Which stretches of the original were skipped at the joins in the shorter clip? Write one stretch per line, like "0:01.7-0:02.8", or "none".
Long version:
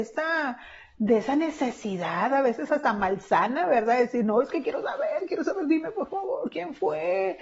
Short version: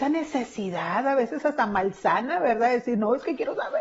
none

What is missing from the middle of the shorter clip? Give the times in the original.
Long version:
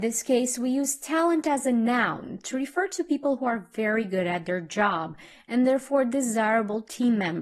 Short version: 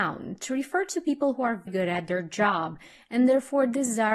0:03.7-0:04.1

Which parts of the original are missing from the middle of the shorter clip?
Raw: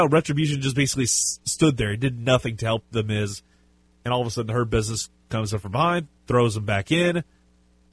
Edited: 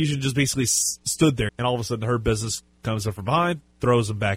0:01.9-0:03.9

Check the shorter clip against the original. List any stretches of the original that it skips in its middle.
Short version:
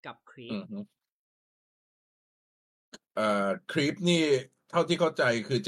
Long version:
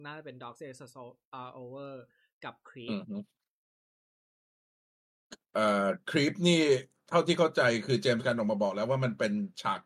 none

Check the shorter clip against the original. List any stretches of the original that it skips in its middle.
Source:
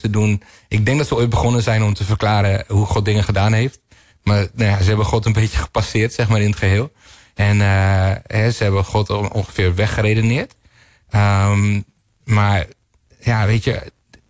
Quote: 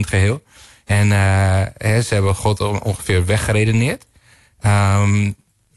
none

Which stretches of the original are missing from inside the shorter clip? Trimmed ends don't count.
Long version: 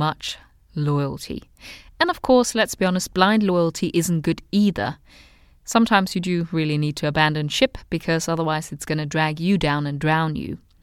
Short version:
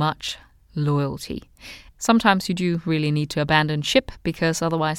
0:01.9-0:05.6

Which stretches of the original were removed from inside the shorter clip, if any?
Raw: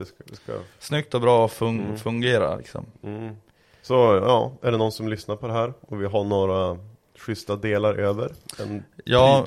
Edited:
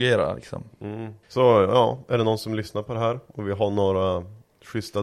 0:03.5-0:03.8

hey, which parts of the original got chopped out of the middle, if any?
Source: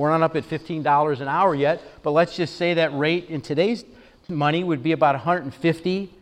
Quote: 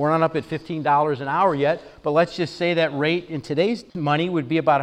0:03.9-0:04.2

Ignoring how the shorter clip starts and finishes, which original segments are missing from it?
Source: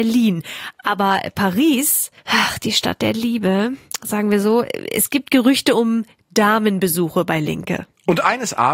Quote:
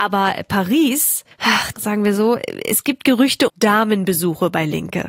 0:02.6-0:04.0
0:05.7-0:06.2

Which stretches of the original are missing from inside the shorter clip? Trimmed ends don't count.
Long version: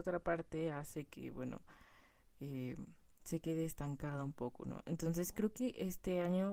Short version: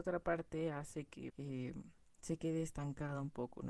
0:01.3-0:02.3

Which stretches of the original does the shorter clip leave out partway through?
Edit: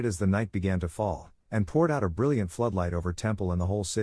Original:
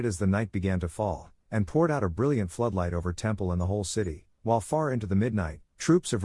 none

